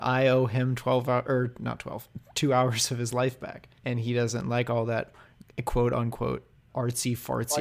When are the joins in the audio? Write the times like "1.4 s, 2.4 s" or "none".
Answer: 3.8 s, 6.7 s